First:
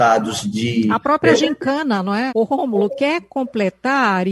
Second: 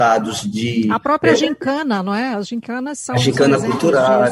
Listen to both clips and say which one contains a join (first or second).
first